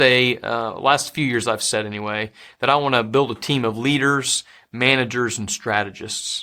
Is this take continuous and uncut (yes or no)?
yes